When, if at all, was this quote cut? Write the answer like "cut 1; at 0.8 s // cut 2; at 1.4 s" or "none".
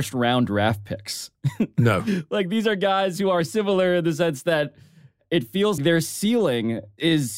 cut 1; at 5.8 s